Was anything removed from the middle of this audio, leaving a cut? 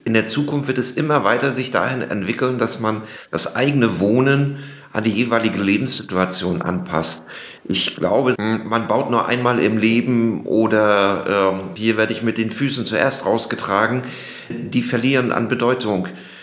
yes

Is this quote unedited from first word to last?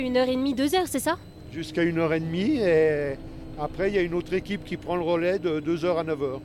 yes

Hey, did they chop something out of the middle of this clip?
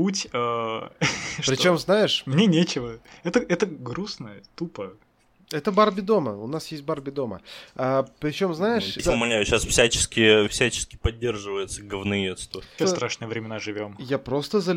yes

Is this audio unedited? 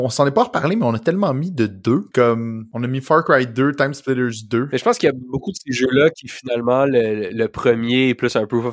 yes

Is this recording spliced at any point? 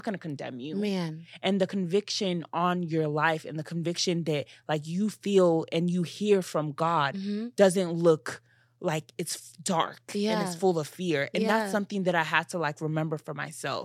no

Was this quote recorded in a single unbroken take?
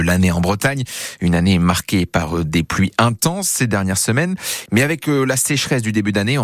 no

